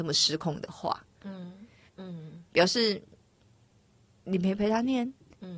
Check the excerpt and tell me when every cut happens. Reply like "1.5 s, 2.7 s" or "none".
1.9 s